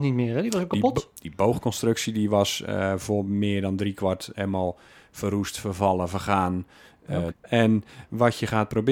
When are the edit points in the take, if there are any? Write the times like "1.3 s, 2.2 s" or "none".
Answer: 7.3 s